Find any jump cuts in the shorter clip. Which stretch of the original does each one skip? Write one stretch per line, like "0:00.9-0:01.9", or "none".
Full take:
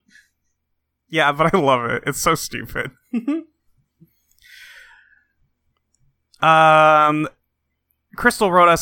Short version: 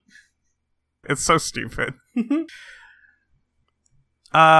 0:01.0-0:02.0
0:03.5-0:04.6